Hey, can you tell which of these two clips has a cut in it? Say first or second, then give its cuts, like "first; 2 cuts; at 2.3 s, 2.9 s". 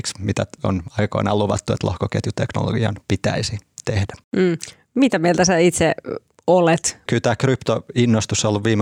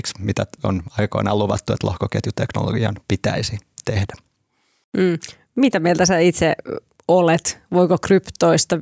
first; 2 cuts; at 4.2 s, 7.1 s